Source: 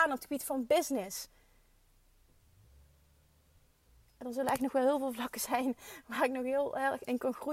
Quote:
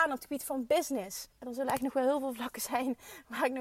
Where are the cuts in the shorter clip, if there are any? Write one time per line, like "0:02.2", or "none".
0:01.3